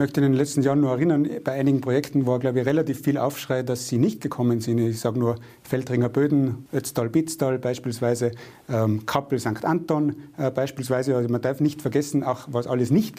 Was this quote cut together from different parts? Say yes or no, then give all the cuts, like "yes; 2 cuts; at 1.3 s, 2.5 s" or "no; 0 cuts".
yes; 1 cut; at 6.7 s